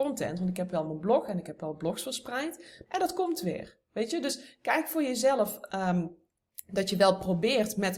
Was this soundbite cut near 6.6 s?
no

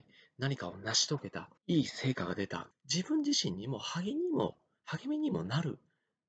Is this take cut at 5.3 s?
no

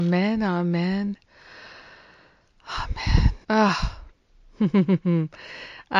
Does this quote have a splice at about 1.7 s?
no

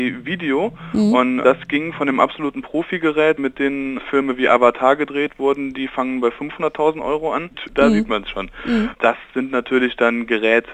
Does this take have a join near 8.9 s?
yes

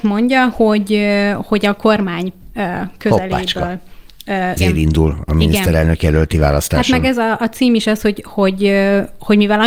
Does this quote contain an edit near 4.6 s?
yes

